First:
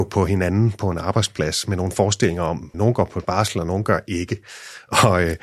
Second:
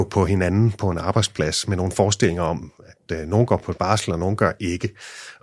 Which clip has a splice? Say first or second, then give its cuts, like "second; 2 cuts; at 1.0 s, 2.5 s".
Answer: first; 1 cut; at 2.7 s